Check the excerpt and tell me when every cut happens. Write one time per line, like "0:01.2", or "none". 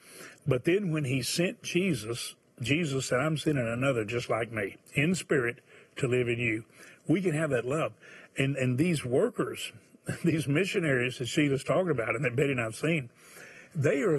0:04.9